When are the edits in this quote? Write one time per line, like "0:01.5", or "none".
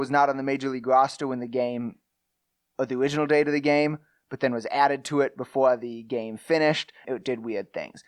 0:07.0